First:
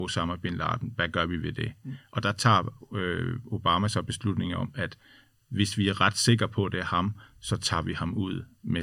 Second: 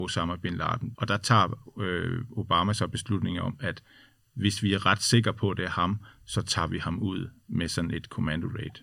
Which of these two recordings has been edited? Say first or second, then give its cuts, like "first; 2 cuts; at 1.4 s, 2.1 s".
second; 1 cut; at 0.9 s